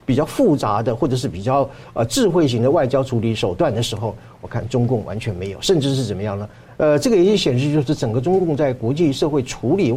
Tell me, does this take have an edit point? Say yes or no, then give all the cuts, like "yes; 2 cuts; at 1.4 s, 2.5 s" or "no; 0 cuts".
yes; 1 cut; at 6.7 s